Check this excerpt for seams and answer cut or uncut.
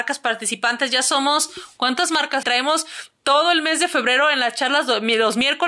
cut